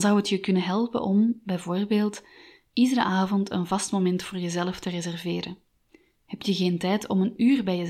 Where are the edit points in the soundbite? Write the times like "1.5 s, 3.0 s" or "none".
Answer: none